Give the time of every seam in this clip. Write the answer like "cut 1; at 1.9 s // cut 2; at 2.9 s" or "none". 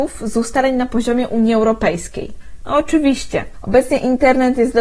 cut 1; at 2.6 s